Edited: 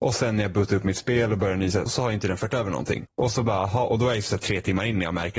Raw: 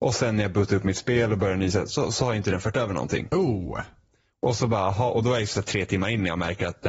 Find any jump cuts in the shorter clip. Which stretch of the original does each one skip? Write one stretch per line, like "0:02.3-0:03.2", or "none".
0:01.9-0:02.1
0:03.3-0:04.3